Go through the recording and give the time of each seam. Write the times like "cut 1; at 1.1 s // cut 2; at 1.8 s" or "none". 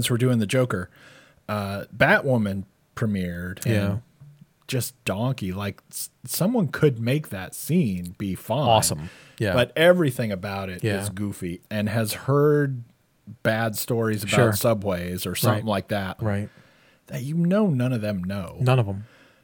cut 1; at 3.7 s // cut 2; at 11.6 s // cut 3; at 16.2 s